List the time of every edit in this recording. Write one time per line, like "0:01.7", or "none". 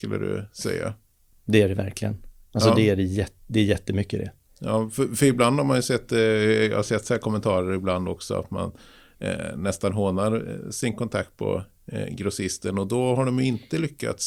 0:01.3